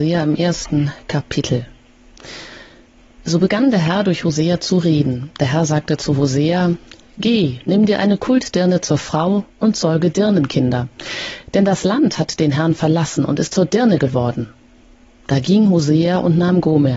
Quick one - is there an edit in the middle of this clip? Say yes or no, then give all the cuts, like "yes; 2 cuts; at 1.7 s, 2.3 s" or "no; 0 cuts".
no; 0 cuts